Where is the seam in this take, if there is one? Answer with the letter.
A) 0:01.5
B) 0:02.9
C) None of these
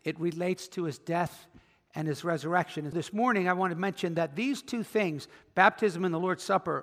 B